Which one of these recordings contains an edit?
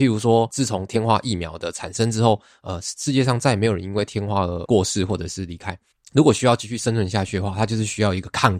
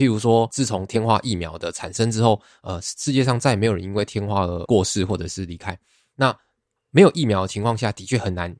first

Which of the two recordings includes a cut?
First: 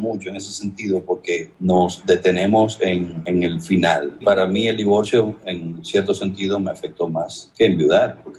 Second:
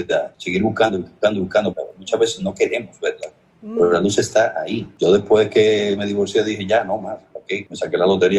second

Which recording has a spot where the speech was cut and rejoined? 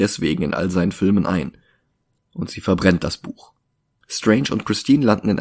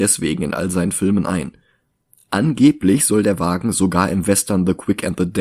first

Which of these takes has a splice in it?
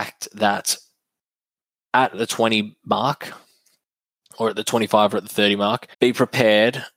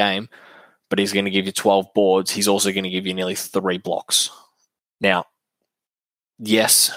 first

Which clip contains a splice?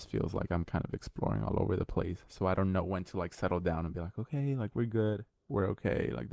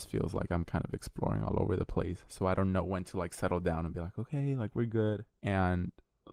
second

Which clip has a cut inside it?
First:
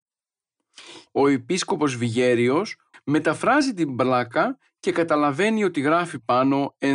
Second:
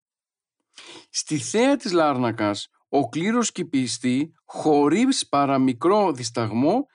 first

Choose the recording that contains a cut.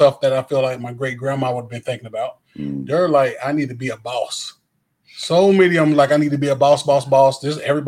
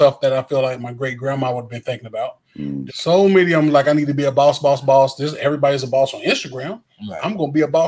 second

